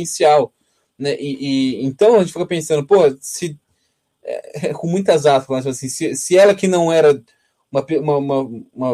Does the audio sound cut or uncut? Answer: uncut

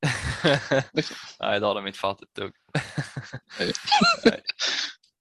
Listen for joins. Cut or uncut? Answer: uncut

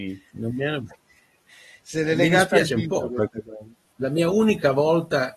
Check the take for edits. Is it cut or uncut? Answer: uncut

